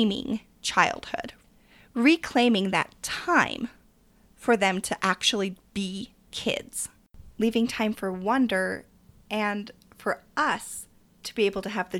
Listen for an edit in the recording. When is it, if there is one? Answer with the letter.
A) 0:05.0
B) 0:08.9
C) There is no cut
C